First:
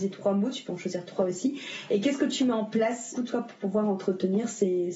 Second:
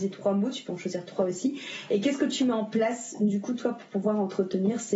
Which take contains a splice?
first; 1 cut; at 3.1 s

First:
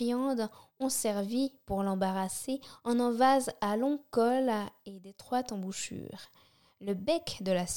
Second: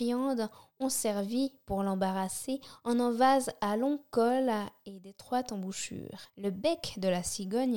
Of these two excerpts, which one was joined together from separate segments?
second; 1 cut; at 6.3 s

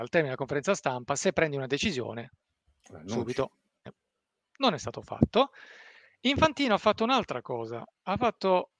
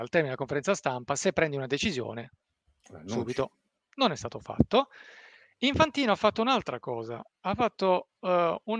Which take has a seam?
second; 1 cut; at 3.8 s

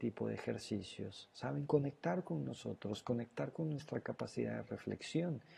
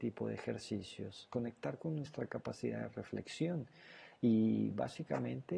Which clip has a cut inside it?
second; 1 cut; at 1.3 s

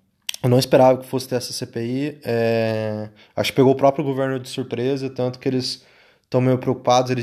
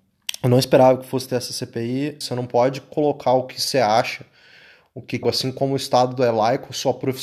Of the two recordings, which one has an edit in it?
second; 2 cuts; at 2.2 s, 5.2 s

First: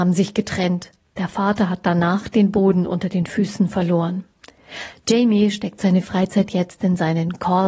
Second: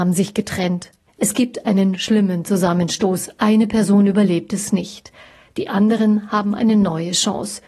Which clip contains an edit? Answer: second; 1 cut; at 1.1 s

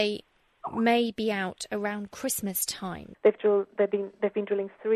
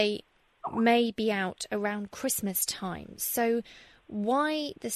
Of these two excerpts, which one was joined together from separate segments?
first; 1 cut; at 3.1 s

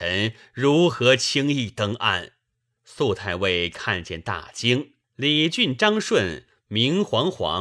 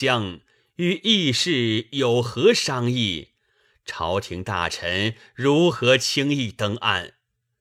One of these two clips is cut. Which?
first; 2 cuts; at 2.8 s, 5.0 s

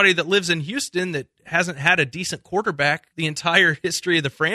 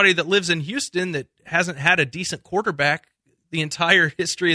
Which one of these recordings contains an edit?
first; 1 cut; at 3.1 s

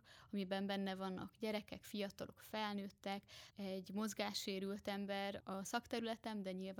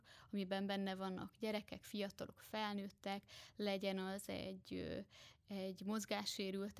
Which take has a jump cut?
first; 2 cuts; at 3.5 s, 5.4 s

